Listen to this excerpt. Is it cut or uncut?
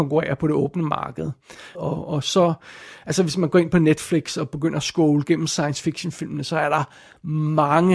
cut